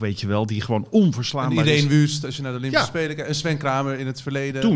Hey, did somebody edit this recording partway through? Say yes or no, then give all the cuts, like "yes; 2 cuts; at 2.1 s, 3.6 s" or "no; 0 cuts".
no; 0 cuts